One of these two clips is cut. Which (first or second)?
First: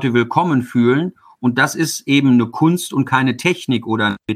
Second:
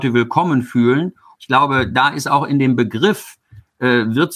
second